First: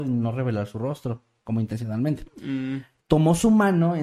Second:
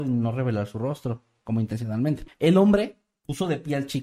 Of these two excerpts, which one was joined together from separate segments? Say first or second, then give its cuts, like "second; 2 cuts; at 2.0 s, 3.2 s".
second; 1 cut; at 2.3 s